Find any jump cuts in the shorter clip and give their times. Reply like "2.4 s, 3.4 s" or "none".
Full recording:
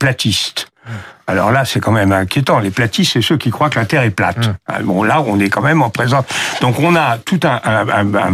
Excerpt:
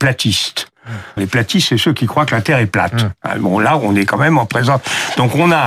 1.2 s